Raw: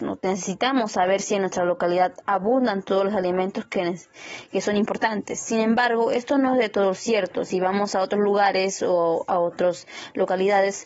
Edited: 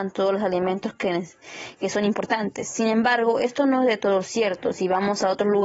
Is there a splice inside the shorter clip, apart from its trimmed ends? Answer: no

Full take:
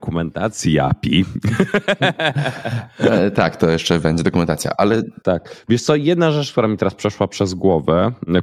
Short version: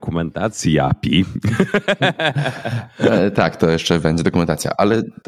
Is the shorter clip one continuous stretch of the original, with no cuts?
yes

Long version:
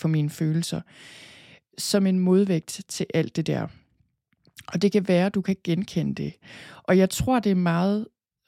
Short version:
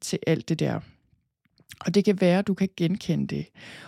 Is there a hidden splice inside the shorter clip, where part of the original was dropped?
no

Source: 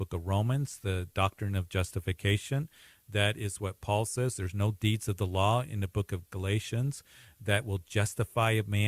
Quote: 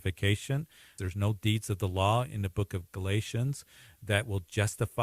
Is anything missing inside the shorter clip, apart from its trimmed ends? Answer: yes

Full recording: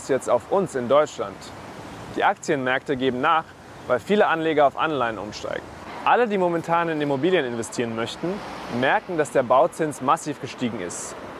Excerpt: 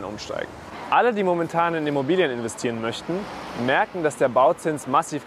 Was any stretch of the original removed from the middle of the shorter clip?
no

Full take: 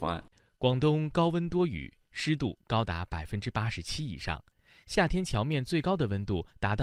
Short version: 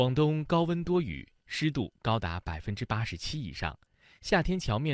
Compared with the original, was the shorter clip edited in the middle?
no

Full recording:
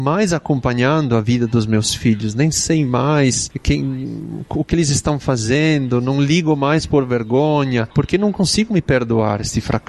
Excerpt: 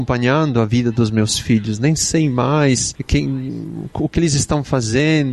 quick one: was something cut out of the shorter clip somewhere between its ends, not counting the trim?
no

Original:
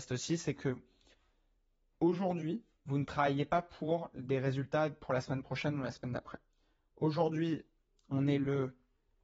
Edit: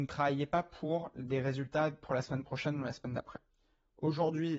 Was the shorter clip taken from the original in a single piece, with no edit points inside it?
yes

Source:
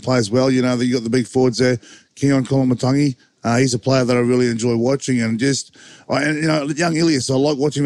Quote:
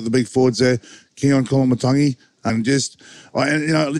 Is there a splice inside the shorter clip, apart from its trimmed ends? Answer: yes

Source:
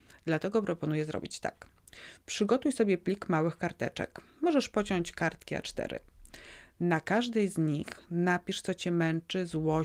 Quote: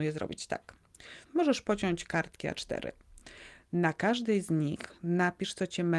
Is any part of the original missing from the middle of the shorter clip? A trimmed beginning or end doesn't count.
yes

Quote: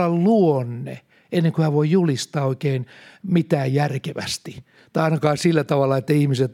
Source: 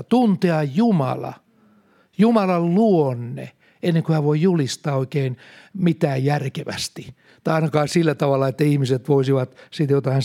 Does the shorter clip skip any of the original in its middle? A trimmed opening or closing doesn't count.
no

